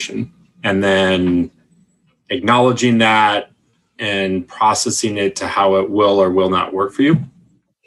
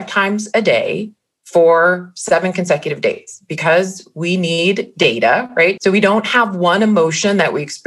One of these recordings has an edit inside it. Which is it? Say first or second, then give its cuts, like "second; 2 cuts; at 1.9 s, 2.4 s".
second; 1 cut; at 5.8 s